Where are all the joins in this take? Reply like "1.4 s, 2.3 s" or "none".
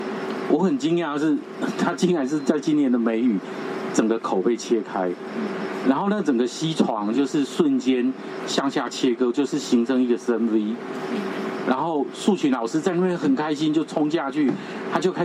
none

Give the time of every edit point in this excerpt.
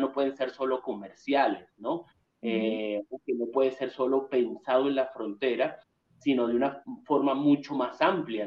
none

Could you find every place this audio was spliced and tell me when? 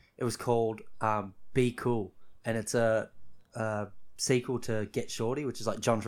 none

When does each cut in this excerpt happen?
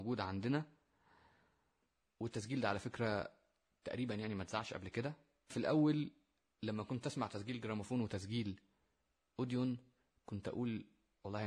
none

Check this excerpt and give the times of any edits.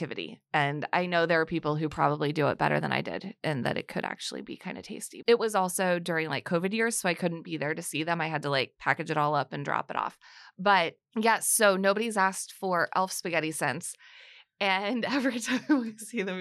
5.2 s

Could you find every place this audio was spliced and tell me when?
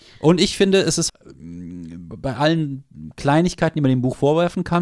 1.1 s

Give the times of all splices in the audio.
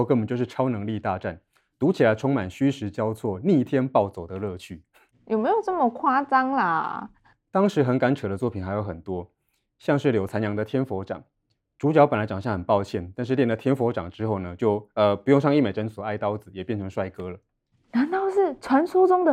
5.1 s

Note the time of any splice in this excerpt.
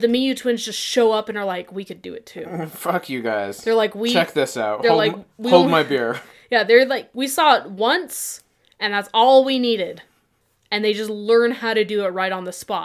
none

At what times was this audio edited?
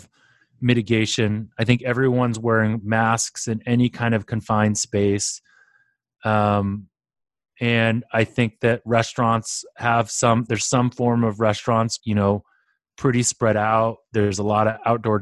12.0 s

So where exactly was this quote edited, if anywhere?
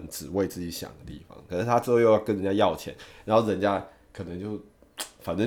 1.5 s

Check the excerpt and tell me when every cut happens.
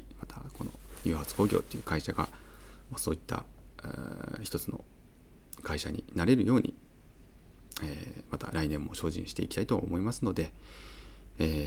none

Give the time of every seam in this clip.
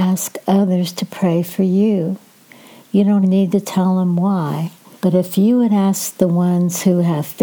3.2 s, 4.9 s

